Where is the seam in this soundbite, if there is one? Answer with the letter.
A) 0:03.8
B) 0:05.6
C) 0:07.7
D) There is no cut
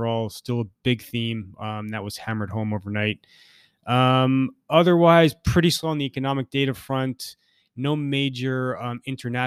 D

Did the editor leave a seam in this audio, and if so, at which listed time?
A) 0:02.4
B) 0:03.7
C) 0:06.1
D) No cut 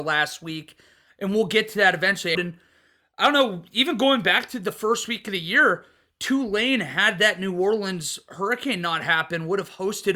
A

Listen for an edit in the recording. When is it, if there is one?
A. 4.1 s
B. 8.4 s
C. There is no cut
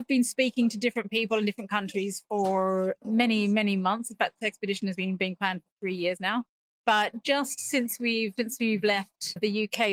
B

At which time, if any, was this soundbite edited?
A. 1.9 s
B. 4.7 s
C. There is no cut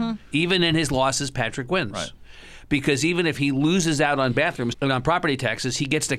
B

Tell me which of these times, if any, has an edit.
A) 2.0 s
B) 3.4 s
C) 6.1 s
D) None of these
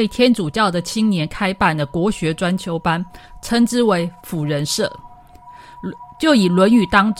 D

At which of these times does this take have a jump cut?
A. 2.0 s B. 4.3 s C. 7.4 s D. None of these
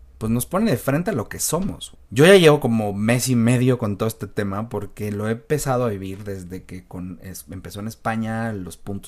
A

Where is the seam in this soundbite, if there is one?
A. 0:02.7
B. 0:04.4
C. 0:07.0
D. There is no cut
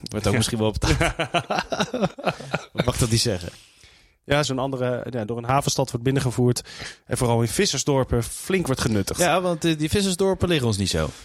B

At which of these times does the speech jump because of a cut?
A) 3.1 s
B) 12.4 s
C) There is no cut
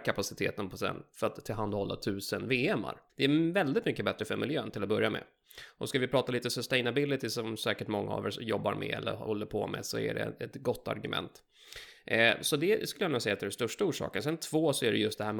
A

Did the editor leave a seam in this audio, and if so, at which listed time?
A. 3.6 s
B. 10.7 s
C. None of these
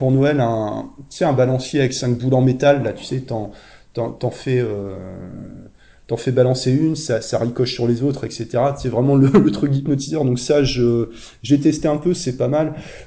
C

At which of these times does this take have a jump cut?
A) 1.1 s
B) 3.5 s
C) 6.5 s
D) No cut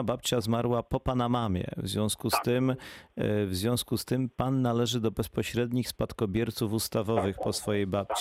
D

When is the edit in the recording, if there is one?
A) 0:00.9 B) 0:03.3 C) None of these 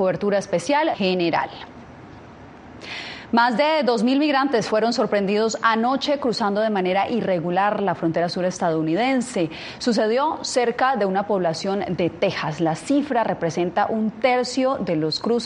A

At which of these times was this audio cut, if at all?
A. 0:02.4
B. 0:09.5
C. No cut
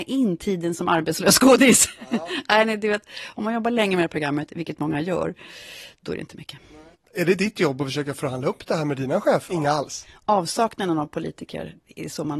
B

